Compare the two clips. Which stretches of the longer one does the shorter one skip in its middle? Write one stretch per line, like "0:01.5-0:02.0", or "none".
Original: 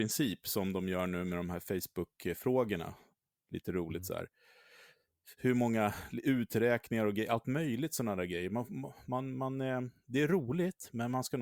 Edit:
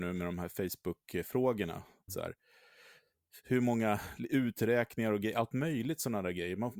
0:03.2-0:04.0